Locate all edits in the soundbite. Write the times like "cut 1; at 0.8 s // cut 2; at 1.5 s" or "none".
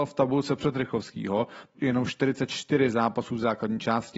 cut 1; at 1.7 s